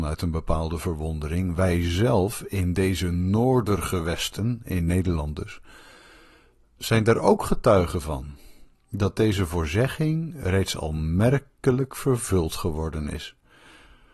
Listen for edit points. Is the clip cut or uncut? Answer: uncut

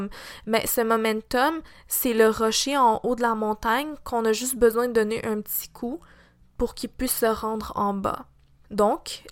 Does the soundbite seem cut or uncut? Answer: uncut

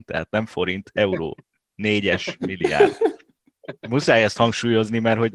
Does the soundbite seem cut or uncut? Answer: uncut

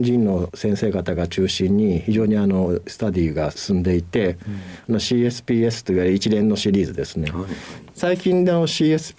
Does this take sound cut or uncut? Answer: uncut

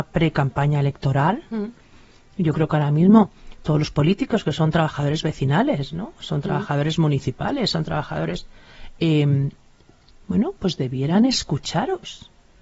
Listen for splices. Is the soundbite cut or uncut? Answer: uncut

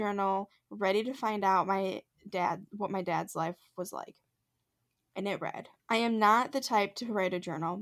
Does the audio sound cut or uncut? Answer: cut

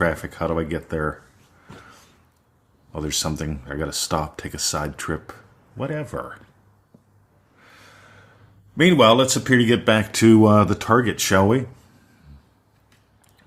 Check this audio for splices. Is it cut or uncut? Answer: uncut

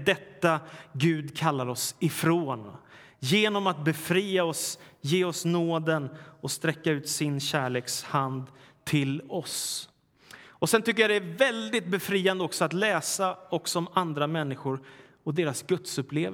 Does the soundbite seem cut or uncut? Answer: uncut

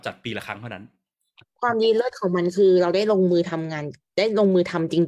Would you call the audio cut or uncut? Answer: uncut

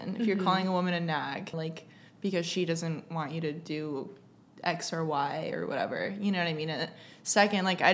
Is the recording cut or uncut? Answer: cut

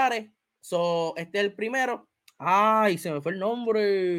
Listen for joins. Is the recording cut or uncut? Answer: cut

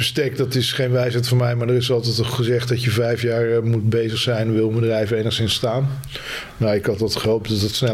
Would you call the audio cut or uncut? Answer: uncut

